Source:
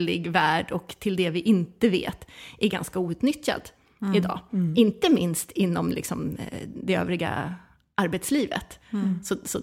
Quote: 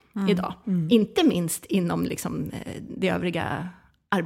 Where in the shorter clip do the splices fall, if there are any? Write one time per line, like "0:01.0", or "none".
none